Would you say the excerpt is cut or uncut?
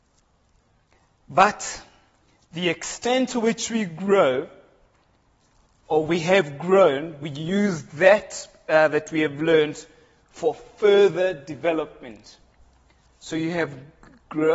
uncut